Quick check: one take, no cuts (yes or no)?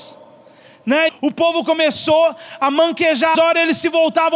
no